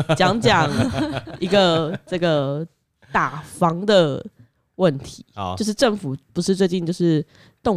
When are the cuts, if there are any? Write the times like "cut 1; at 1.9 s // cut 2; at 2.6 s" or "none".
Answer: none